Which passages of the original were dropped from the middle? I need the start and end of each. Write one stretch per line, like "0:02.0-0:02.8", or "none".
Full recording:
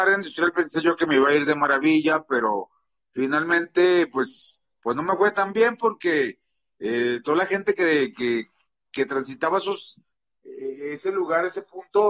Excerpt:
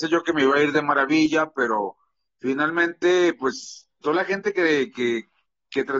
0:04.7-0:07.2